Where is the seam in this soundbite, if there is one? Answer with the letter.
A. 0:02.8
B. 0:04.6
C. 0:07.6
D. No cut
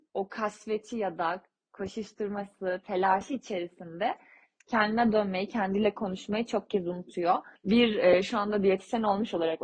C